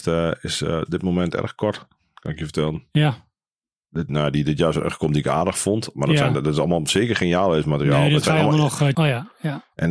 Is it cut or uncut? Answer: cut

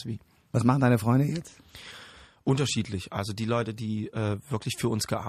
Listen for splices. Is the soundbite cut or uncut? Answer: uncut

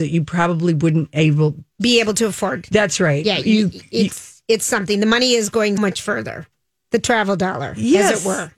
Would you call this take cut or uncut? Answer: cut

